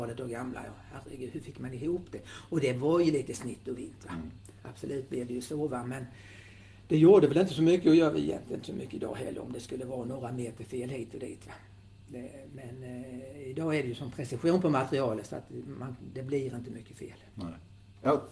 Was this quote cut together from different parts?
no; 0 cuts

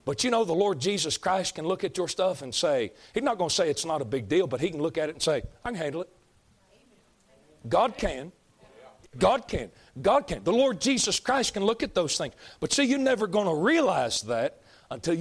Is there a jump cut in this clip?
no; 0 cuts

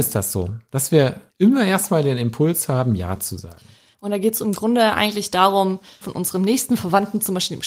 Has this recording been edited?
yes; 3 cuts; at 1.3 s, 3.9 s, 6.0 s

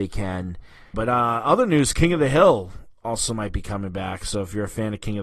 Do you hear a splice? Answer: yes; 1 cut; at 0.9 s

